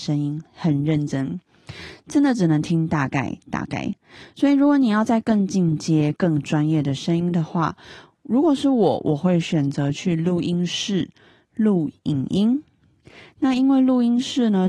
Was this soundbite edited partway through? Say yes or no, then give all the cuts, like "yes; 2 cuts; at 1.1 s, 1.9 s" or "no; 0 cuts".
no; 0 cuts